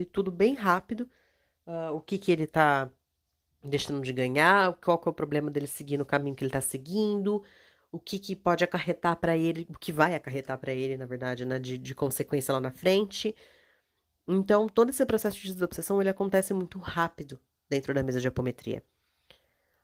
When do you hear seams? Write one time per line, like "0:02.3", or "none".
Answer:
none

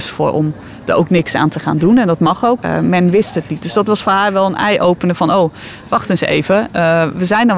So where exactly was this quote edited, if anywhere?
0:02.6

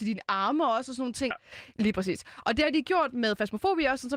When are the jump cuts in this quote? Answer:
0:01.3

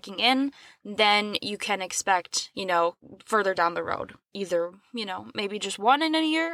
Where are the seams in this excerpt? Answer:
0:04.2

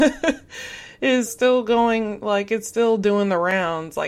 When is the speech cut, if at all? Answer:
0:01.3

